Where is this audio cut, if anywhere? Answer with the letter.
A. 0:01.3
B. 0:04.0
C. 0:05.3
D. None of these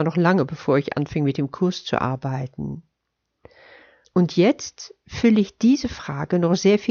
B